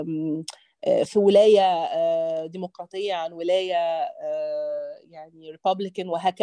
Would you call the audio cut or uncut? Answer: cut